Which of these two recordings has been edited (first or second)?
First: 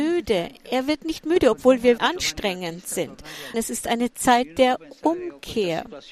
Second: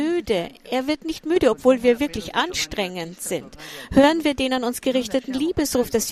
first